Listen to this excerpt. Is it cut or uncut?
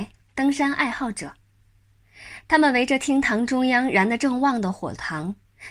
uncut